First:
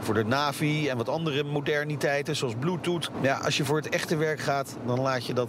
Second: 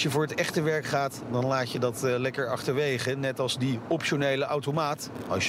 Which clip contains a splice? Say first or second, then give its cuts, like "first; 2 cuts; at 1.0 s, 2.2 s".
first; 1 cut; at 3.1 s